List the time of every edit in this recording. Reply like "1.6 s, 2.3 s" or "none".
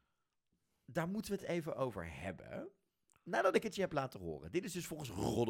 none